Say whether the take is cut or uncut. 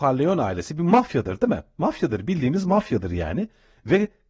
uncut